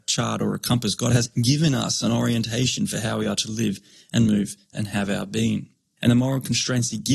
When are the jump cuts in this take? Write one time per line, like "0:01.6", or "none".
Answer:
0:06.0